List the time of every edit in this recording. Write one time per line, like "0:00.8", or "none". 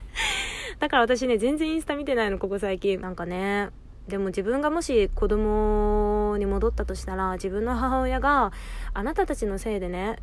0:03.0